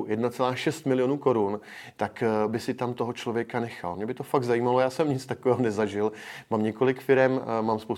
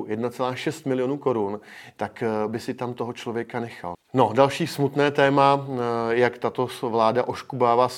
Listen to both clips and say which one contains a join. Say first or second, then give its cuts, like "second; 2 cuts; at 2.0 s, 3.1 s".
second; 1 cut; at 3.9 s